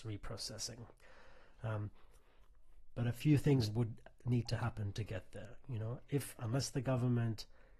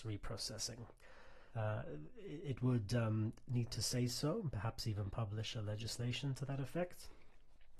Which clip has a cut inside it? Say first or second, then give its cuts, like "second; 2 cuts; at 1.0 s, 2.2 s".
second; 1 cut; at 1.5 s